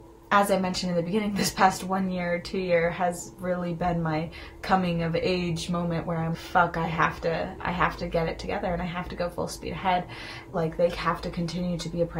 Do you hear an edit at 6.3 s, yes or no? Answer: yes